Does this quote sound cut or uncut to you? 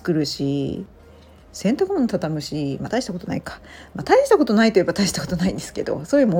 uncut